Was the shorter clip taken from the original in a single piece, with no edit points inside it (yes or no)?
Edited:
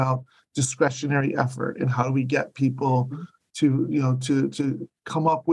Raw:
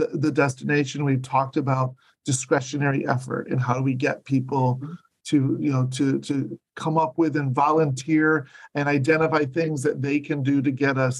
yes